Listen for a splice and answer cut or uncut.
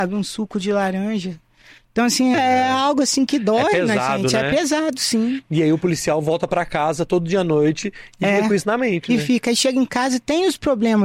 cut